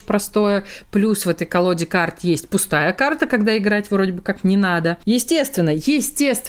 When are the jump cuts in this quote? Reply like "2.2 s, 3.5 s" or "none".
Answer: none

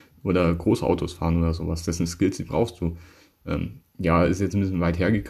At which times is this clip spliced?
none

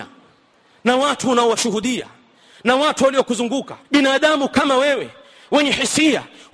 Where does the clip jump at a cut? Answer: 3.8 s

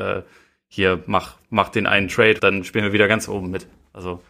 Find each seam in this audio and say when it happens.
2.4 s

